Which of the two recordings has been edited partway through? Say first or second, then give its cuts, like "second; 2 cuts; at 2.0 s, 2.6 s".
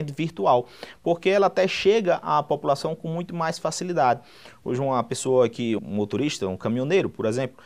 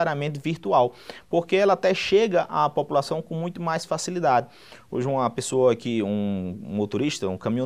first; 1 cut; at 5.8 s